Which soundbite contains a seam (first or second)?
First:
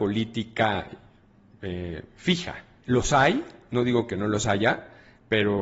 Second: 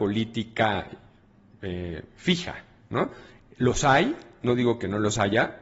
first